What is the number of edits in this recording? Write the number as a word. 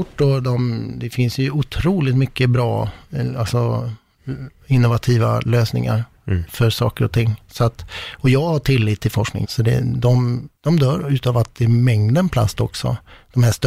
two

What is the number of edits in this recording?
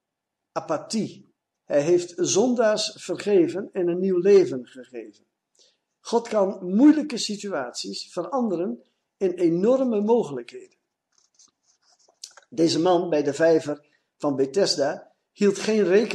one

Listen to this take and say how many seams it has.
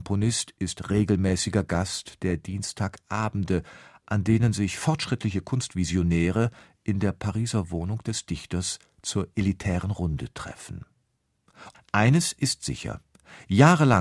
one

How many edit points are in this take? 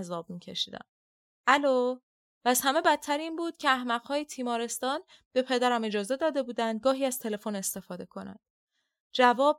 one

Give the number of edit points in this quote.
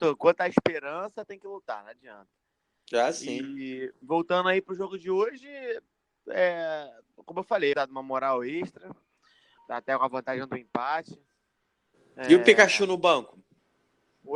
two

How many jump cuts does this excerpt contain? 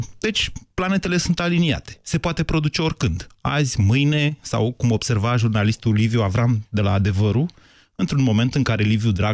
zero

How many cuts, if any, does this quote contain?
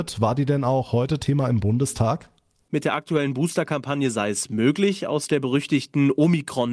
one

